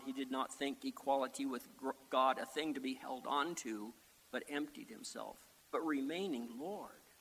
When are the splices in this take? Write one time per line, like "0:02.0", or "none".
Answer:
0:05.6